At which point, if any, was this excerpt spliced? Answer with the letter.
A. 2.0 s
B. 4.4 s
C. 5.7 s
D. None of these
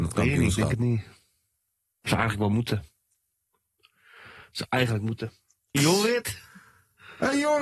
C